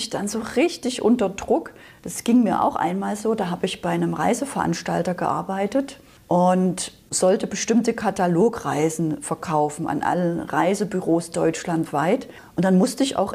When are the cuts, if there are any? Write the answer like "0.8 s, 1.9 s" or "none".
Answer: none